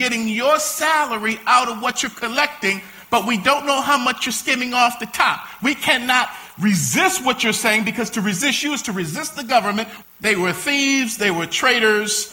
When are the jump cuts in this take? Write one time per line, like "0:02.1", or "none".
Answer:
0:05.6
0:10.0